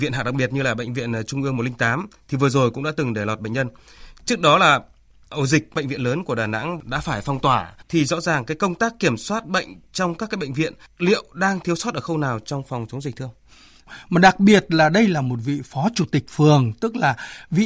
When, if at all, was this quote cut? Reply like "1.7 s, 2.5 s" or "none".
7.8 s, 14.1 s